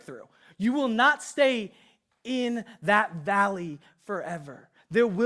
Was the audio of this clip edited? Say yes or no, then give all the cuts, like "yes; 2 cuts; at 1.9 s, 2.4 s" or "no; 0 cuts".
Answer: no; 0 cuts